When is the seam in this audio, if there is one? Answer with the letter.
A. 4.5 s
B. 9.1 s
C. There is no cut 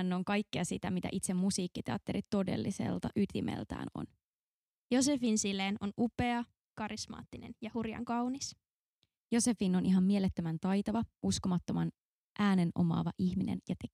C